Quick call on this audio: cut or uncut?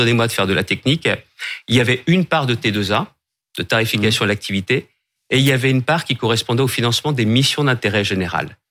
uncut